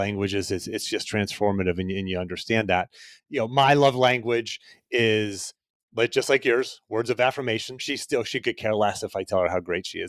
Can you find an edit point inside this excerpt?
yes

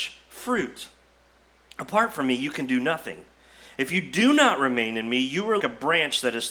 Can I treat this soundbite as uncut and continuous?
no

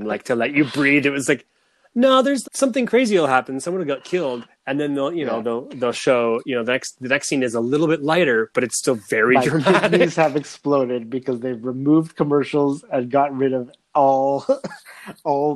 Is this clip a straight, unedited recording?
no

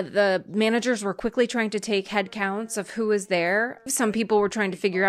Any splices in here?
yes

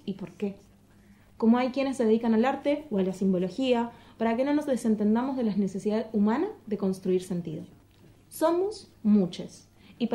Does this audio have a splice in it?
no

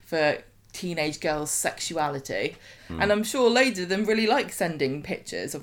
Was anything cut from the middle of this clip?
yes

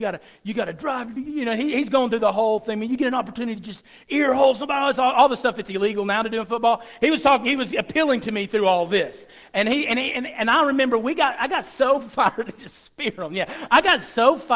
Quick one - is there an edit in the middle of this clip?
no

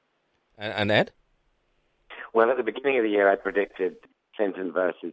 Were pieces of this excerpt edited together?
no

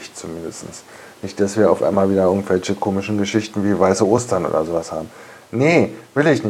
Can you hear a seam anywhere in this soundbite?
no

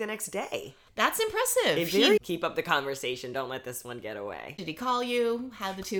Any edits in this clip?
yes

